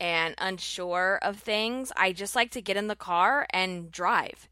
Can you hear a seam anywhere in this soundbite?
no; 0 cuts

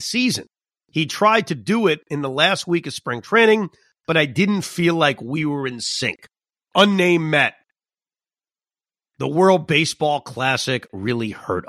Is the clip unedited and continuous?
no; 1 cut; at 6.7 s

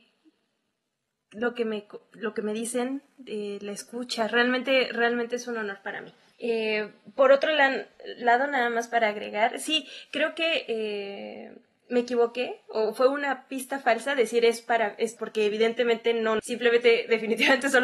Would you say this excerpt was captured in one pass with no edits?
no; 3 cuts; at 6.3 s, 15.2 s, 16.4 s

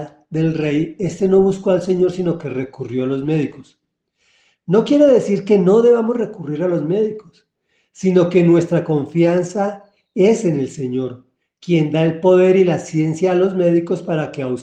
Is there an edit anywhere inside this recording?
no; 0 cuts

